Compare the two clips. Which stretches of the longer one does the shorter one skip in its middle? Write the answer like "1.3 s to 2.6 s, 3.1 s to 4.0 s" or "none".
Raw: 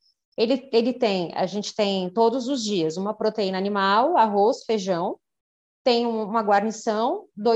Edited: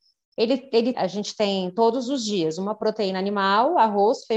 0.9 s to 1.3 s